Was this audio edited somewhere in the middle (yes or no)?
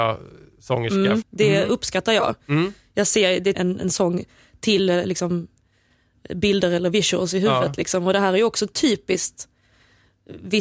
yes